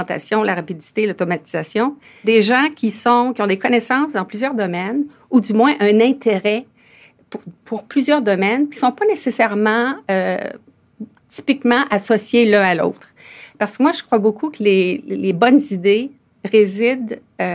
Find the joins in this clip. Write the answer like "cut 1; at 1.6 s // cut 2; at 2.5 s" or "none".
cut 1; at 2.2 s